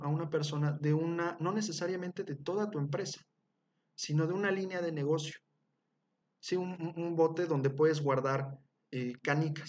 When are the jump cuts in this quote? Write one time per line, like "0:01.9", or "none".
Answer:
0:06.2